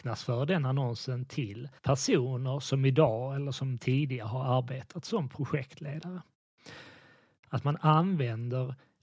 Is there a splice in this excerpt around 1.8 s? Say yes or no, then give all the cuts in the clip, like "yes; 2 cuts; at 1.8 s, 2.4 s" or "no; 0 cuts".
yes; 2 cuts; at 1.8 s, 7.4 s